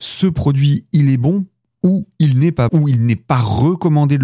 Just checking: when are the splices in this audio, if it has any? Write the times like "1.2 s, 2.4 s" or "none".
2.7 s